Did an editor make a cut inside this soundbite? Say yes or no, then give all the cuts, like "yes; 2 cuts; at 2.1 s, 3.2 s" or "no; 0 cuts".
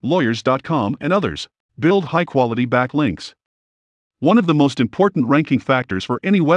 yes; 1 cut; at 1.7 s